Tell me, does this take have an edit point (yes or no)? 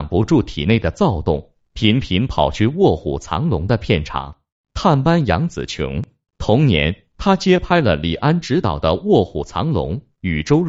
yes